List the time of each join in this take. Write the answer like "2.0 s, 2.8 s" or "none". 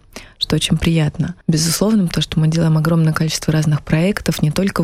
1.4 s